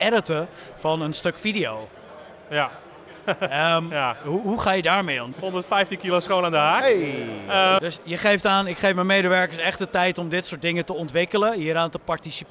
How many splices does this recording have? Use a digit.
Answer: 2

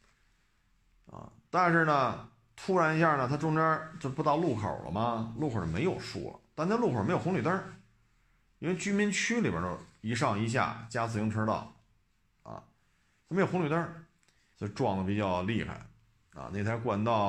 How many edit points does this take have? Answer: 1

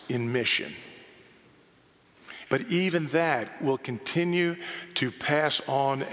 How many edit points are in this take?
1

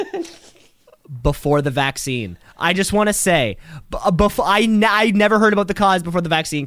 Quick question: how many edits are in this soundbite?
0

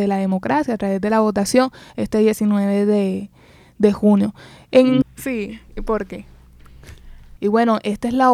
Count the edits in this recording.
2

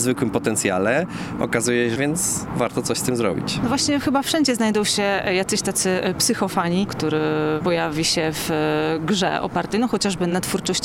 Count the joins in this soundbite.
2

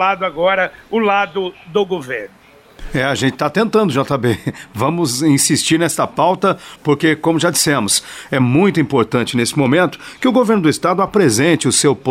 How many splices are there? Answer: 0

